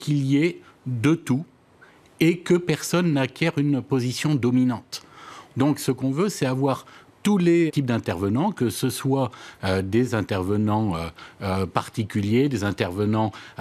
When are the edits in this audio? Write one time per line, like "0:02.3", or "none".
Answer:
0:05.5
0:07.7